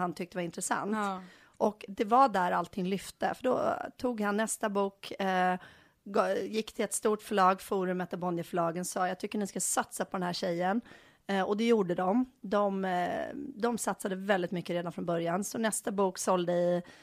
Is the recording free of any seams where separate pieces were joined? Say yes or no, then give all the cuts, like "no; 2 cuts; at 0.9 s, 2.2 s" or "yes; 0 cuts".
yes; 0 cuts